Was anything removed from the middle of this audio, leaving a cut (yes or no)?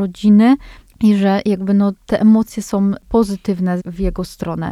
yes